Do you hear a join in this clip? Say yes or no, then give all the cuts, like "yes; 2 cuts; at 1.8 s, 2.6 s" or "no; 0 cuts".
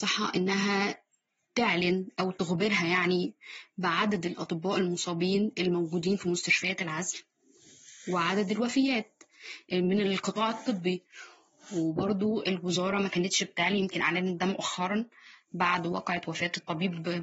no; 0 cuts